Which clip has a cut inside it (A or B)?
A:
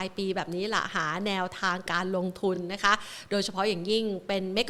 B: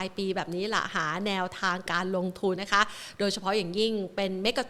B